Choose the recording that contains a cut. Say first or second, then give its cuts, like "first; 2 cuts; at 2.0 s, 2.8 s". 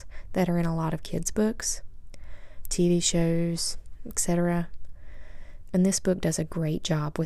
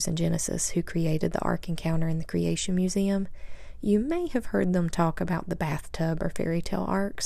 first; 2 cuts; at 2.6 s, 5.6 s